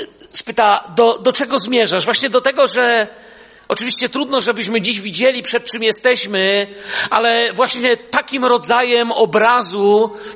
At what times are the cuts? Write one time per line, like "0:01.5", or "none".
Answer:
none